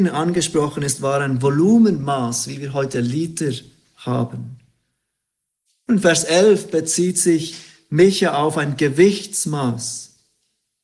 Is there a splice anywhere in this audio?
no; 0 cuts

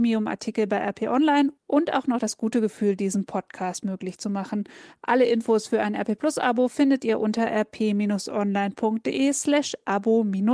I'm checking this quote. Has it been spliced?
no; 0 cuts

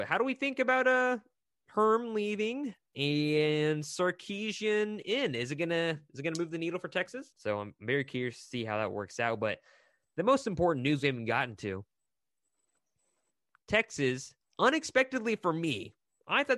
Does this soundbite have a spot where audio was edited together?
yes; 1 cut; at 7.3 s

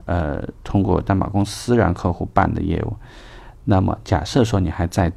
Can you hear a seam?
no; 0 cuts

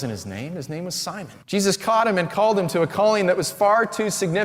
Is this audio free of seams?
no; 1 cut; at 1.4 s

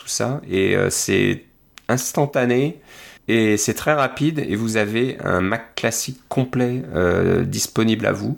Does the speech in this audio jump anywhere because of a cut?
yes; 1 cut; at 3.2 s

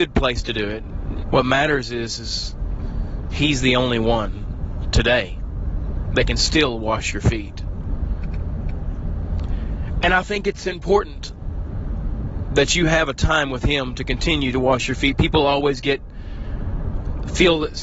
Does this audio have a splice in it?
yes; 1 cut; at 1.2 s

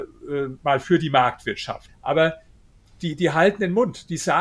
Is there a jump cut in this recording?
yes; 1 cut; at 1.9 s

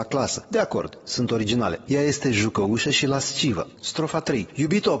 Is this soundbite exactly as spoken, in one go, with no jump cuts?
no; 2 cuts; at 1.9 s, 3.7 s

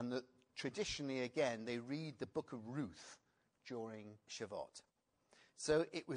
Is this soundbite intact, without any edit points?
no; 1 cut; at 4.3 s

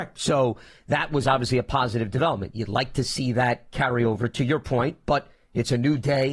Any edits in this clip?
no; 0 cuts

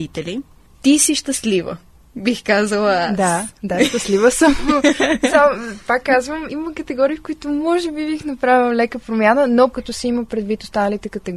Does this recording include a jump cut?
yes; 1 cut; at 6.5 s

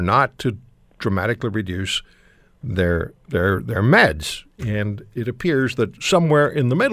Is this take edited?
no; 0 cuts

